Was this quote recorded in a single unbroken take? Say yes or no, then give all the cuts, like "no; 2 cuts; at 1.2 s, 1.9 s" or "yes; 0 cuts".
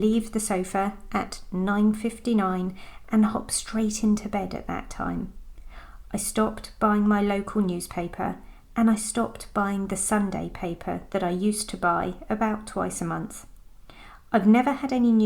yes; 0 cuts